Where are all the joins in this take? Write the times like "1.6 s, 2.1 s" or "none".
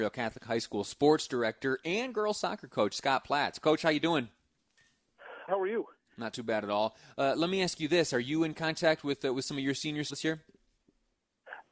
5.5 s, 10.1 s